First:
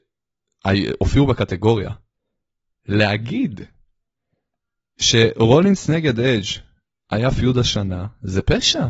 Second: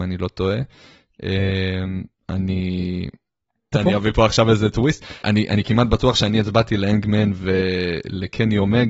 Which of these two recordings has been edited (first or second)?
second